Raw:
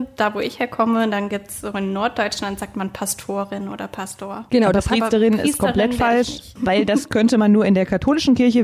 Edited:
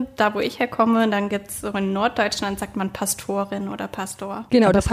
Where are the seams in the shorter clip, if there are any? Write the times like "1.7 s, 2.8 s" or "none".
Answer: none